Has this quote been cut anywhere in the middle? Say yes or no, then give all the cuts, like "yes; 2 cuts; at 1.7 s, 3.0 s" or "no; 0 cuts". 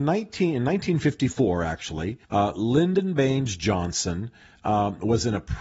yes; 1 cut; at 2.2 s